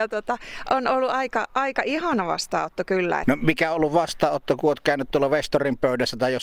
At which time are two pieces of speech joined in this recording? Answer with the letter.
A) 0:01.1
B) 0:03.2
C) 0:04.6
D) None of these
B